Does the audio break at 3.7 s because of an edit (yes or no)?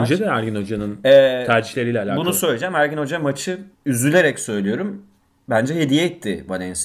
yes